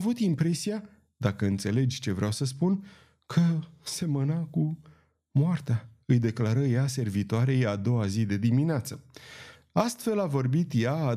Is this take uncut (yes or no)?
no